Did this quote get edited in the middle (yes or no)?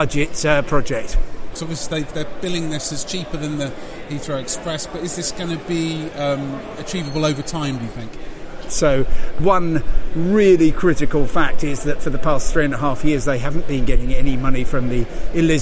yes